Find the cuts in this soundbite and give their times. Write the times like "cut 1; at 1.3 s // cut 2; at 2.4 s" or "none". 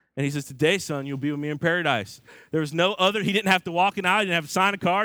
none